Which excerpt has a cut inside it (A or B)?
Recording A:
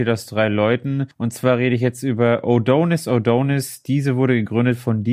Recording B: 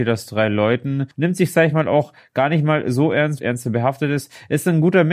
B